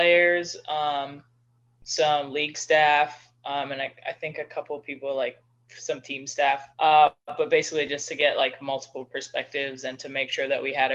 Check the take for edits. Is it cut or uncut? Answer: cut